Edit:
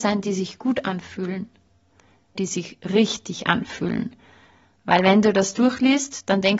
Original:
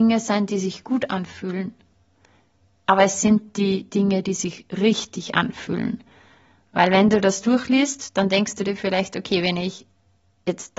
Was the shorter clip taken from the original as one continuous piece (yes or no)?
no